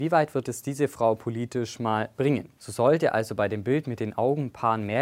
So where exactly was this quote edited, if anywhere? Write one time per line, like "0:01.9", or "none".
0:02.6

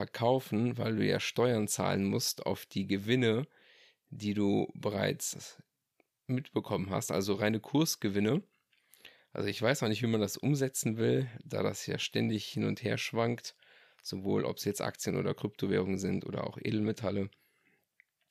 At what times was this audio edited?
none

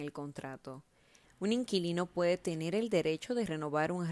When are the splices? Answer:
0:01.2

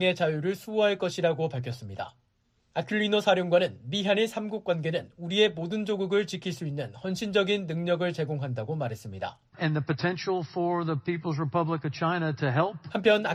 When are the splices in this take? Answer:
0:09.5

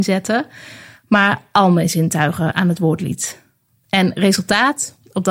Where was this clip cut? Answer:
0:02.5

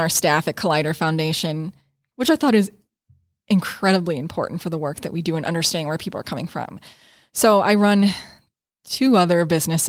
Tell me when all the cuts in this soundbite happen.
0:02.1

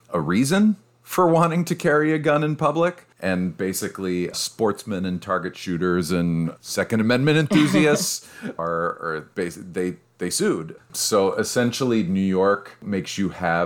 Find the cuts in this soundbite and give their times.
0:04.3
0:08.6
0:10.8

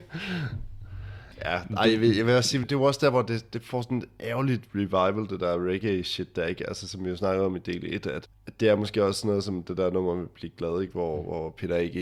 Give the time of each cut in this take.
0:02.6

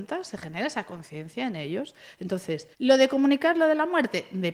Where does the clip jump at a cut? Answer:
0:02.7

